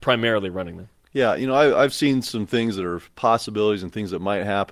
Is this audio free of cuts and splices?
yes; 0 cuts

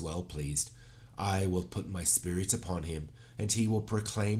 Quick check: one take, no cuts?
yes; 0 cuts

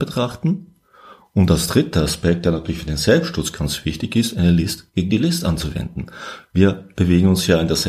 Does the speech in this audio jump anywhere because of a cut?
no; 0 cuts

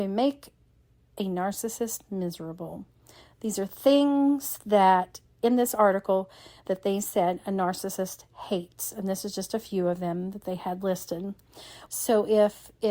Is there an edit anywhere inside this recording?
yes; 1 cut; at 11.9 s

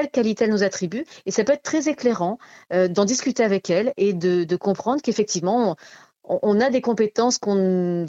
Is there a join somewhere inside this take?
no; 0 cuts

